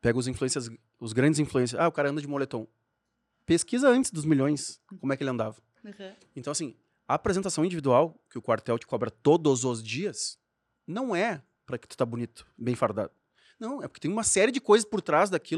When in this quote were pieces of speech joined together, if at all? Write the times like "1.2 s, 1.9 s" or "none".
none